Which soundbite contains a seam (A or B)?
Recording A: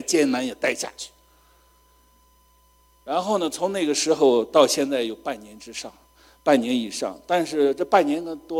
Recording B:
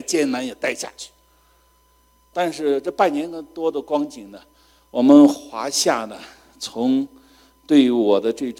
B